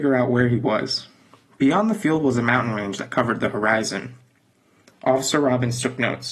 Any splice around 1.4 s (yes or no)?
no